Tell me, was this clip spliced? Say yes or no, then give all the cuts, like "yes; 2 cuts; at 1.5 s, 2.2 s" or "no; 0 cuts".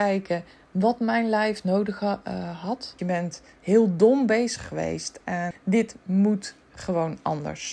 yes; 2 cuts; at 3.0 s, 5.5 s